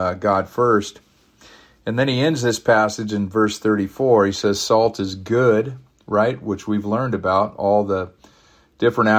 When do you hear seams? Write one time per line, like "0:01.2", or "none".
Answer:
none